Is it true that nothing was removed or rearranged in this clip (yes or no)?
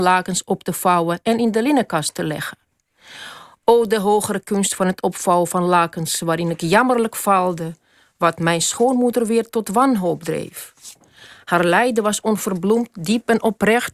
yes